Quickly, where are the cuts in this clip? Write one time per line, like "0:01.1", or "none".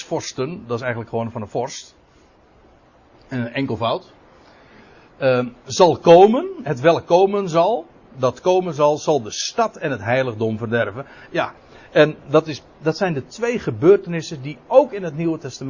0:08.1

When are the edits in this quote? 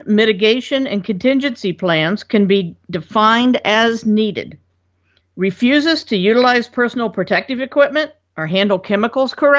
0:05.2

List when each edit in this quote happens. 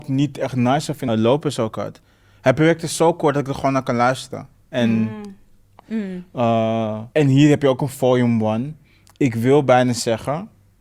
0:01.1
0:05.8
0:07.1

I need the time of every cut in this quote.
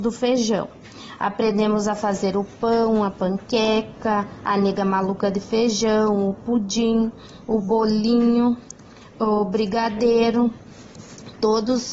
none

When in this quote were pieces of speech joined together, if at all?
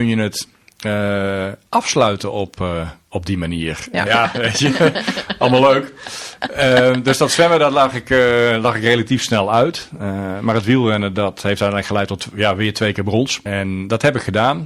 0:04.1
0:13.5

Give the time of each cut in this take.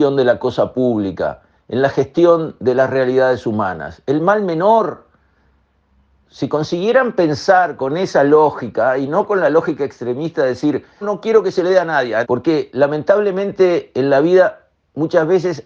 0:06.2
0:11.0
0:12.2

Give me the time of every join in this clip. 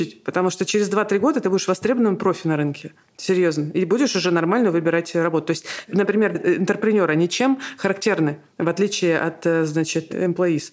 0:06.3

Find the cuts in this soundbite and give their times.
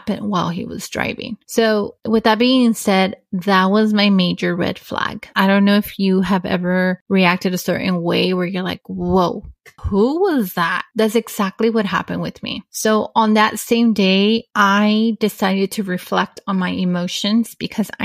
0:05.3

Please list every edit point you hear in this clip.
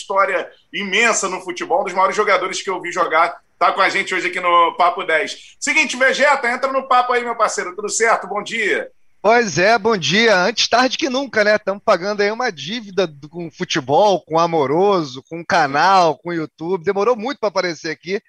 none

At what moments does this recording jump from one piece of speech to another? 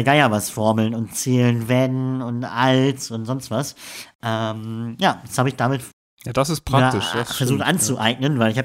none

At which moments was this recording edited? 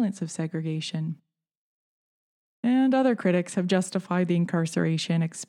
none

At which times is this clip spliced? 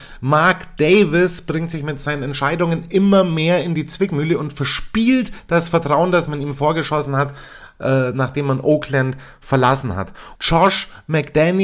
0:10.4

